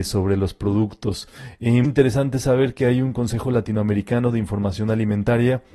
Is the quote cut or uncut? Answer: cut